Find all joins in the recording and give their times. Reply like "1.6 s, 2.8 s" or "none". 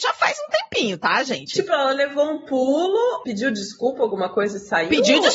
1.5 s